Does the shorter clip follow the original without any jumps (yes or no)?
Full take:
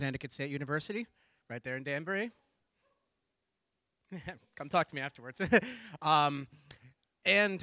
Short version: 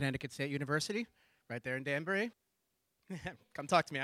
no